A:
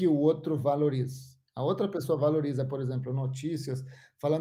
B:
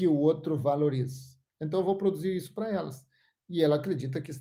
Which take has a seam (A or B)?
B